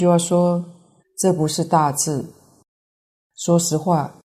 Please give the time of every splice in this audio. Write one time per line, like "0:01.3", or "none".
0:01.0